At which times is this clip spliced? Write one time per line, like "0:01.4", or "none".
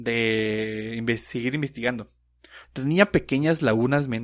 0:02.6